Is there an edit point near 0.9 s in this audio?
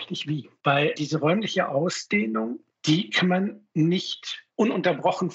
yes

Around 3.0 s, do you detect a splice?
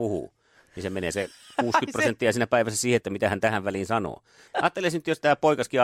yes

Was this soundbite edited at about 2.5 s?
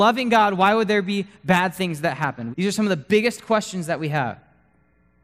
yes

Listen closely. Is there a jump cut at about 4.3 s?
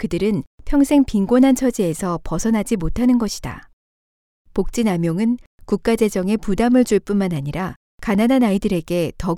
yes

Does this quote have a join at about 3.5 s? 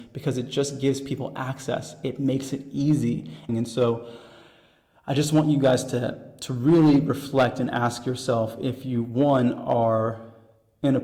yes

